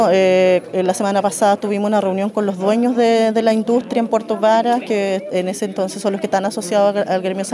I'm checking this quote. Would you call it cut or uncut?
uncut